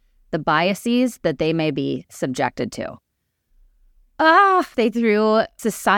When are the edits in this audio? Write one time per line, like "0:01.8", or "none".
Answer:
0:04.7